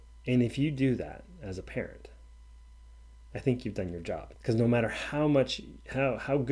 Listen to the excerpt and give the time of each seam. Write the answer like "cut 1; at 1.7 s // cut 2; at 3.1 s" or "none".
cut 1; at 4.3 s